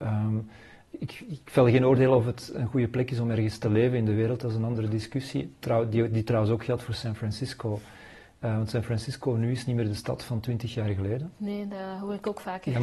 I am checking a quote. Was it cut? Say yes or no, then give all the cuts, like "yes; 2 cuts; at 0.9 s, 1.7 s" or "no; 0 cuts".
no; 0 cuts